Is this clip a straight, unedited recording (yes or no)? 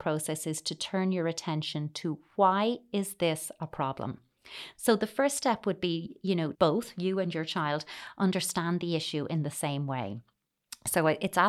no